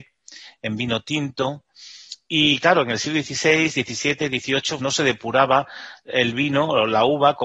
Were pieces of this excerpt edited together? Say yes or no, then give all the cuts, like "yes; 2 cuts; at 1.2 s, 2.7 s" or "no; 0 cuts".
yes; 1 cut; at 4.8 s